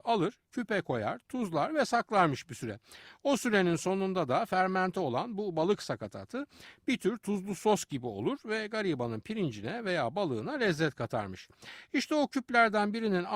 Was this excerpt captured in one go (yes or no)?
yes